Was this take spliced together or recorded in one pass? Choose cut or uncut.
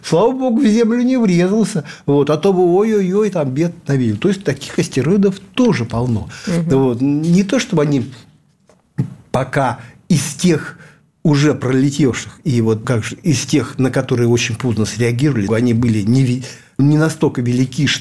cut